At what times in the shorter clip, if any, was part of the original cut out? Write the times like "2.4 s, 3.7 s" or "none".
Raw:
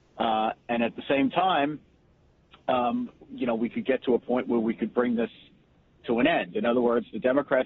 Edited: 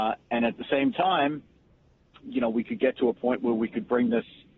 2.2 s